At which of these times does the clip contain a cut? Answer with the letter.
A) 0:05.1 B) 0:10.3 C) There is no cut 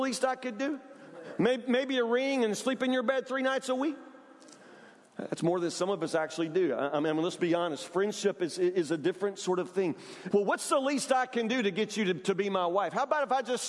B